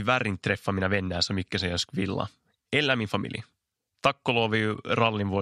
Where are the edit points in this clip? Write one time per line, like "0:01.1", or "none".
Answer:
none